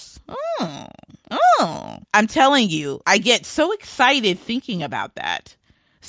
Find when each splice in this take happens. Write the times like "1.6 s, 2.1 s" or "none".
2.0 s